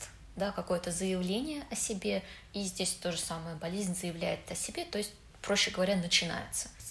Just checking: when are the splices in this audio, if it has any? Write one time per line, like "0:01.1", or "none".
none